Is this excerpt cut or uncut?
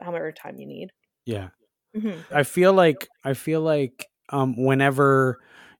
cut